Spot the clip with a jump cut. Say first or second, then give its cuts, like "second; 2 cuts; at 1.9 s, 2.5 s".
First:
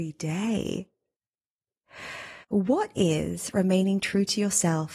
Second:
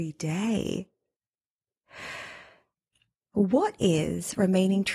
first; 1 cut; at 2.4 s